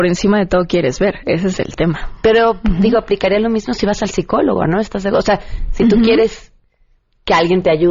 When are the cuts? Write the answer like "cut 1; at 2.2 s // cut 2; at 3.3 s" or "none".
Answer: none